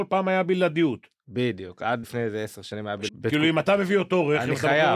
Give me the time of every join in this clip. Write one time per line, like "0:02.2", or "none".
0:02.0
0:03.1